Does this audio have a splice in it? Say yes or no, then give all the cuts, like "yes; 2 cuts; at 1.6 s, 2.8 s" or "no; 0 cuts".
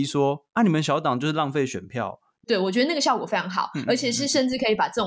yes; 1 cut; at 2.4 s